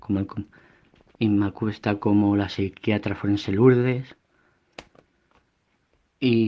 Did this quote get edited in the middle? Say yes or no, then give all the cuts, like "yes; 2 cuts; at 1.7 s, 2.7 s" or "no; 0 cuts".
no; 0 cuts